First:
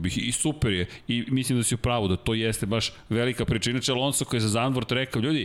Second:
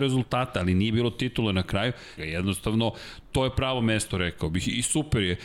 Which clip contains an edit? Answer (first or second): second